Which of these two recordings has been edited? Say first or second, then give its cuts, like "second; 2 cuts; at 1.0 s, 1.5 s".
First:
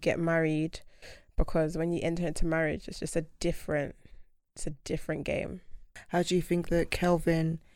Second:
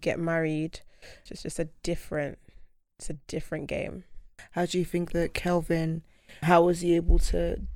second; 2 cuts; at 1.3 s, 6.4 s